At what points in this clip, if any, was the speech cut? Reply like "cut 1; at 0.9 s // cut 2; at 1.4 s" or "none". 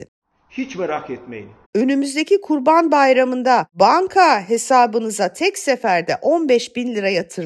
cut 1; at 1.6 s